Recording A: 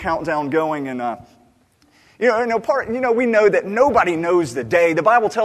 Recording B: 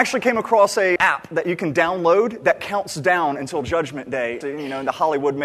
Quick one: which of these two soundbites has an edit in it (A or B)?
B